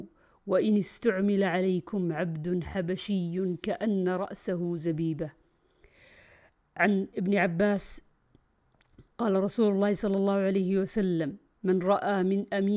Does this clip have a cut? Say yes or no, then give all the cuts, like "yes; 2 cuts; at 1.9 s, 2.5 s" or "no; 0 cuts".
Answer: yes; 1 cut; at 9.2 s